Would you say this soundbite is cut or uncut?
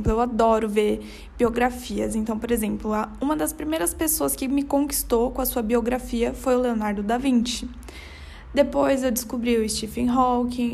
uncut